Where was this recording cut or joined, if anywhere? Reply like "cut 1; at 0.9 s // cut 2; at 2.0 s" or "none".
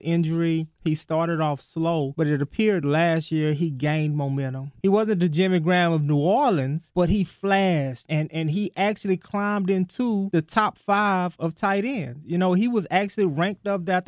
none